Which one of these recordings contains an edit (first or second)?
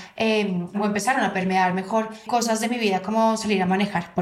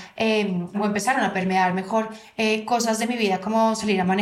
first